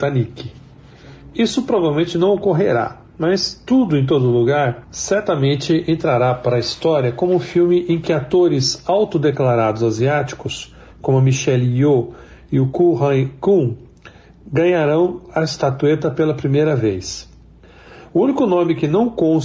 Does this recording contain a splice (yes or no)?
no